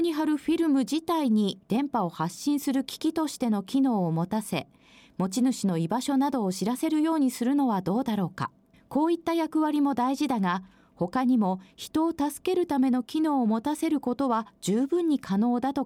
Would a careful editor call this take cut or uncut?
cut